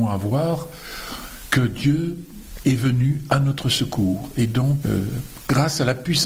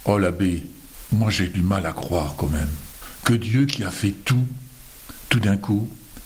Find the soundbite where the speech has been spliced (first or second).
first